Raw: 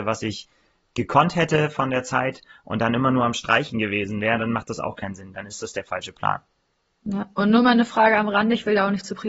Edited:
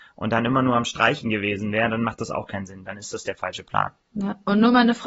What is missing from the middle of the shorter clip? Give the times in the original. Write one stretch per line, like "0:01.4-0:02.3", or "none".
0:06.5-0:06.9